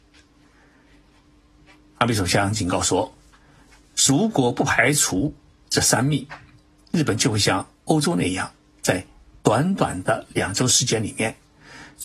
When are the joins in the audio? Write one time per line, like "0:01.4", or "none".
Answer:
none